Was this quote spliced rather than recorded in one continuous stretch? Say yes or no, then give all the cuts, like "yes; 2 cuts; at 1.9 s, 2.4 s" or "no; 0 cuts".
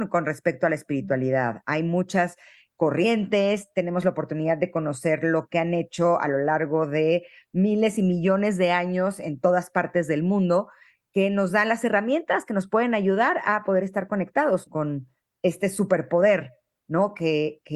yes; 1 cut; at 14.7 s